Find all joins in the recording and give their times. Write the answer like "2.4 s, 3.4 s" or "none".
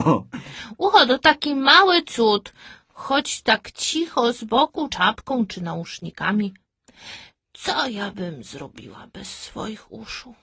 4.9 s